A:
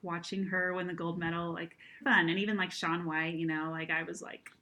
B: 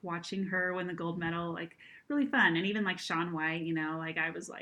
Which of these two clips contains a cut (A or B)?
A